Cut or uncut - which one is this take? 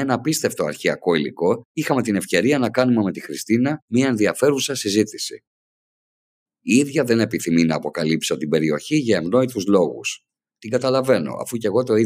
cut